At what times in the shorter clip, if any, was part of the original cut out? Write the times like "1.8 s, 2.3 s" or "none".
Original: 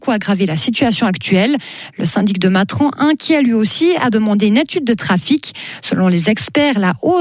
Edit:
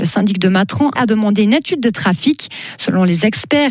1.0 s